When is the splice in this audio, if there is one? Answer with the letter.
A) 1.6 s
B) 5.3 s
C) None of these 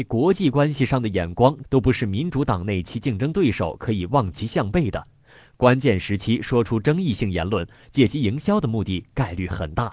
A